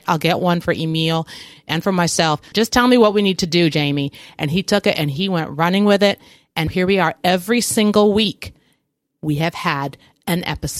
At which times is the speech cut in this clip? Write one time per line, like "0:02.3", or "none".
0:02.5
0:06.7